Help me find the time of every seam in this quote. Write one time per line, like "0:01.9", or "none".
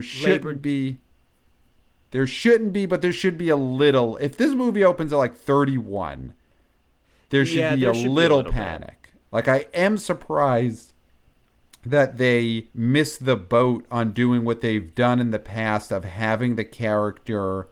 0:09.2
0:12.7